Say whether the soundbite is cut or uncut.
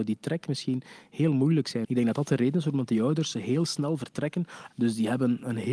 cut